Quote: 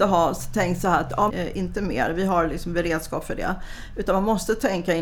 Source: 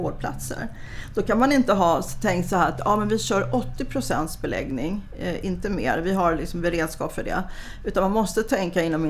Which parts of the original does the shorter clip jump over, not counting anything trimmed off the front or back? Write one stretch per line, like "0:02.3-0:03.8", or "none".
0:03.0-0:05.2